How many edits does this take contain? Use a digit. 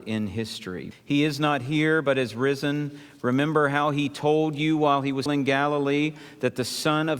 2